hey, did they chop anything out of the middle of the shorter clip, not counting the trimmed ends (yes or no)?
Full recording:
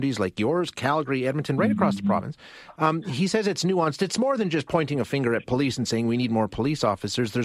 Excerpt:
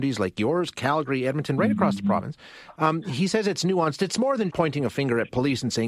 yes